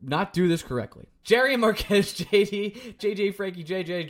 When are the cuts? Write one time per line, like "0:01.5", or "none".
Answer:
0:01.2
0:03.0